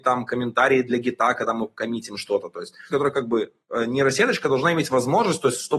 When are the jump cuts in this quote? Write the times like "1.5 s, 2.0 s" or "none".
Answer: 2.9 s